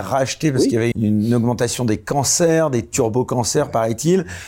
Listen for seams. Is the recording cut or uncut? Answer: cut